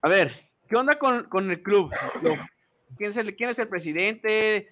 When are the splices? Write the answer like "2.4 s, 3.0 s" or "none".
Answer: 3.0 s